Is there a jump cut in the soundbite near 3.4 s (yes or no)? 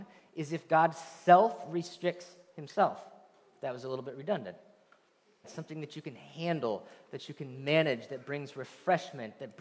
no